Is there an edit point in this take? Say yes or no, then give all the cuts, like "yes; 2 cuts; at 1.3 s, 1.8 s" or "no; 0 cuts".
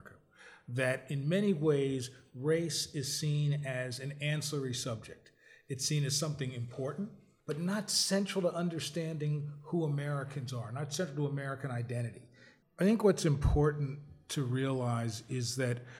yes; 2 cuts; at 7.4 s, 12.6 s